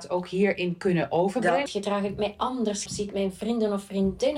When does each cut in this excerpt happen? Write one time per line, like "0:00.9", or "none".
0:01.7
0:02.9